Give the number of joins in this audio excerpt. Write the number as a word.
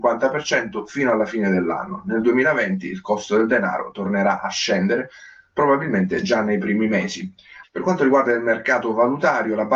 one